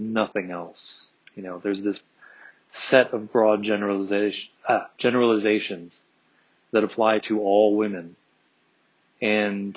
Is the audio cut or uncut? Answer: uncut